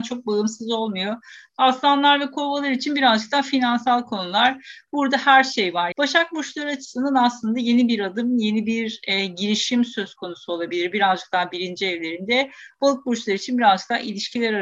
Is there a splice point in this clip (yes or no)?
yes